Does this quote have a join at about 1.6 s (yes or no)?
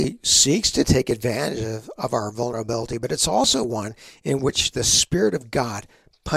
no